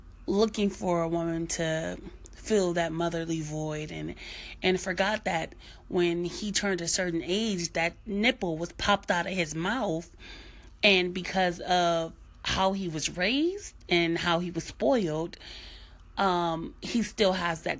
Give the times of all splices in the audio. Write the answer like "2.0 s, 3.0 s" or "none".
none